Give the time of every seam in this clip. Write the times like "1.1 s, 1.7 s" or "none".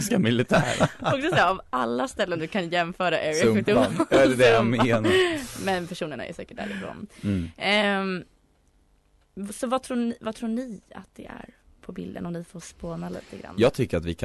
none